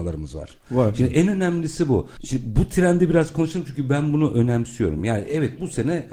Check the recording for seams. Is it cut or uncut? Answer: uncut